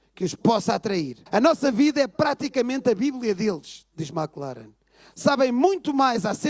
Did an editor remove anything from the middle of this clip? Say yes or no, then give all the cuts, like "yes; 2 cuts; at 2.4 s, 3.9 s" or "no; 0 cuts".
yes; 1 cut; at 1.3 s